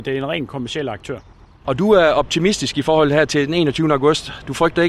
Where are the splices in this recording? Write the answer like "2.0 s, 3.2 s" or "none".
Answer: none